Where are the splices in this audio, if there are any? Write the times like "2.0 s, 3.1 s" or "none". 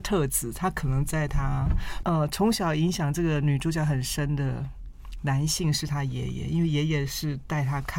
2.0 s